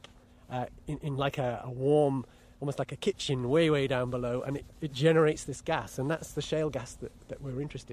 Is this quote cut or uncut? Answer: uncut